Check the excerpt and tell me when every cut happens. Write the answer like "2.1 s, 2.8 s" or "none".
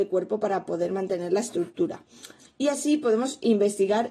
2.4 s